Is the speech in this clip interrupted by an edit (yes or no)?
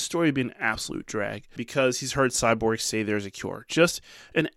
yes